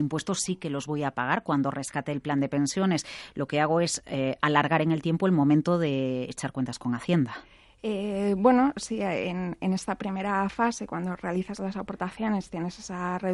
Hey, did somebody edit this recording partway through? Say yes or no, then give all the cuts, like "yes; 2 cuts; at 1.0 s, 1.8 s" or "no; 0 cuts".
no; 0 cuts